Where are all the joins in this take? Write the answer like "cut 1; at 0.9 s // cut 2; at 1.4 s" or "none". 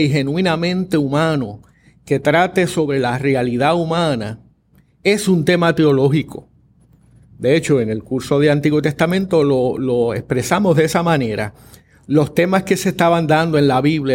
none